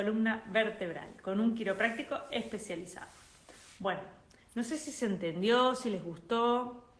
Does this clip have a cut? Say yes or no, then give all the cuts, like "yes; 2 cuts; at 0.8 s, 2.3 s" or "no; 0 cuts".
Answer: no; 0 cuts